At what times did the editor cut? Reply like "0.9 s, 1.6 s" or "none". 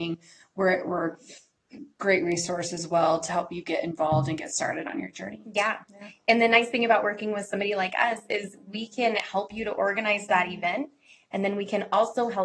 none